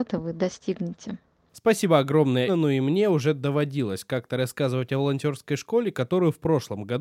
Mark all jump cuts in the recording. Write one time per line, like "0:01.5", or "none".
0:02.5